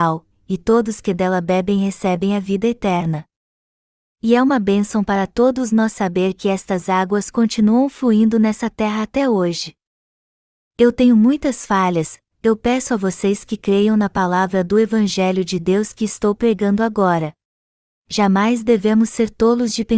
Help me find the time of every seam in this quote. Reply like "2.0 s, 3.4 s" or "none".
12.3 s, 17.9 s